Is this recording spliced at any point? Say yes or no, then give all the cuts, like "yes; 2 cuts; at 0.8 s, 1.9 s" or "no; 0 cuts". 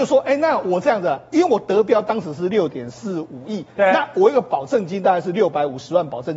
no; 0 cuts